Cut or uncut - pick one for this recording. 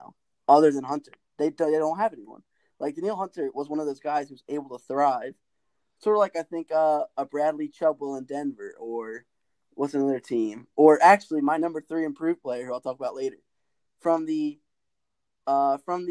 uncut